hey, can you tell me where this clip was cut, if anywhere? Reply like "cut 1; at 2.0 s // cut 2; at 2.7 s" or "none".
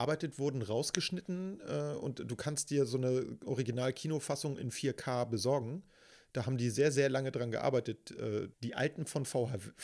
cut 1; at 8.5 s